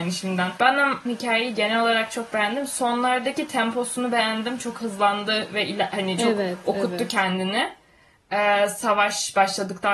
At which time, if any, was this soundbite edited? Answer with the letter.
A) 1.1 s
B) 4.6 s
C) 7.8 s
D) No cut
A